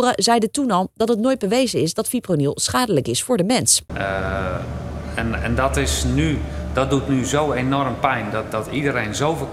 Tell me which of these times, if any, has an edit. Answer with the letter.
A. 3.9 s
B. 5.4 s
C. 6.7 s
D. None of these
A